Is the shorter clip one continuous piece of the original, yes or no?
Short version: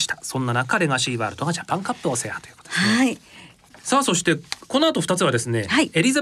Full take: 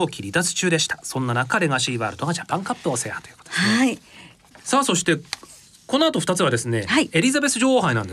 no